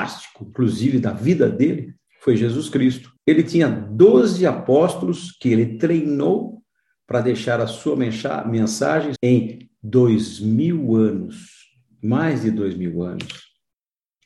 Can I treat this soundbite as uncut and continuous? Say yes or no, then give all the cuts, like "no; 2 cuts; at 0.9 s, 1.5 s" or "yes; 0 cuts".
no; 2 cuts; at 3.2 s, 9.2 s